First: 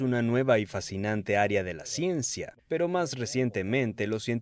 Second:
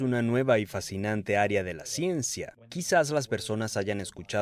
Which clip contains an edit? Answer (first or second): first